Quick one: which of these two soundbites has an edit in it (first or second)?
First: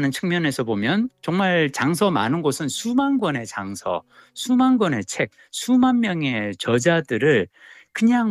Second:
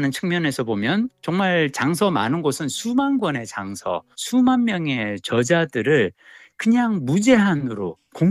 second